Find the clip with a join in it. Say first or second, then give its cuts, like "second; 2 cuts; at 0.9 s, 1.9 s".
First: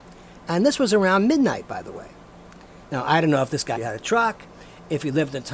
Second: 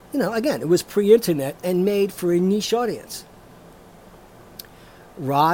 first; 1 cut; at 3.8 s